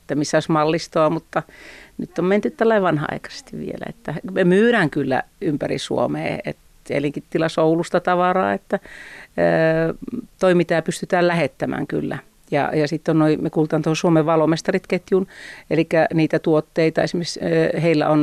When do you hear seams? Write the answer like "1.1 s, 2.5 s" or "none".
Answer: none